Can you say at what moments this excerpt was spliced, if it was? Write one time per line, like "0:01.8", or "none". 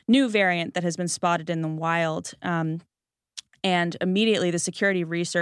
none